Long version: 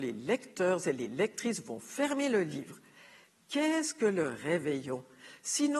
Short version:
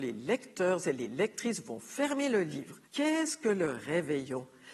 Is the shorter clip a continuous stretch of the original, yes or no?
no